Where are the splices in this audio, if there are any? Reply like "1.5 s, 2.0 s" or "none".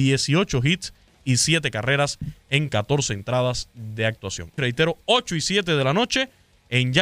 4.6 s